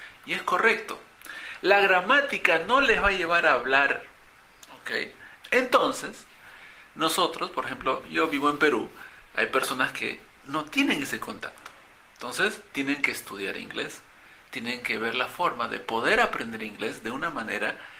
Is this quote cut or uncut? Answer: cut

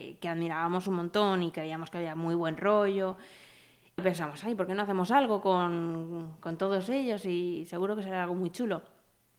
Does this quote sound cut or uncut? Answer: cut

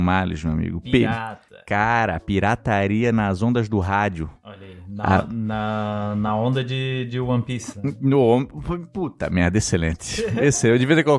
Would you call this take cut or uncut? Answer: uncut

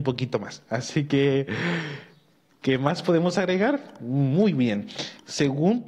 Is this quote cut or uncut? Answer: uncut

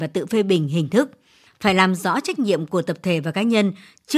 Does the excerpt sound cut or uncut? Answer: cut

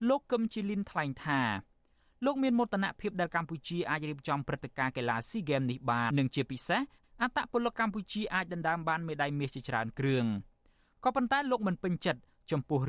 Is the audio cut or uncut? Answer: cut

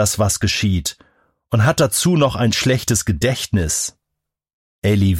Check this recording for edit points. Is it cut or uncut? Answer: uncut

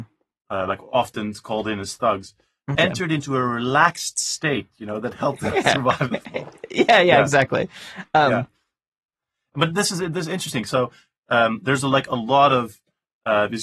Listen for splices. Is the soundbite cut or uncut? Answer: cut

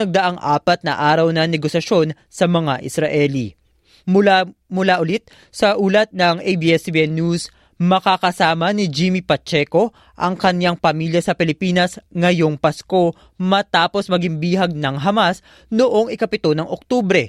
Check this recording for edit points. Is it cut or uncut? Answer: uncut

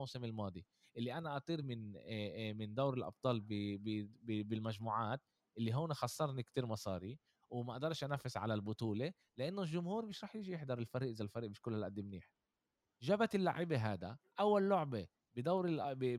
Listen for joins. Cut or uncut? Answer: uncut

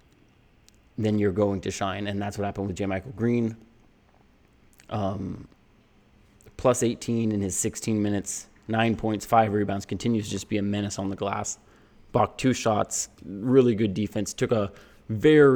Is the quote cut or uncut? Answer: uncut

